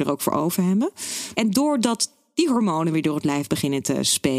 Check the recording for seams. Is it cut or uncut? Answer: cut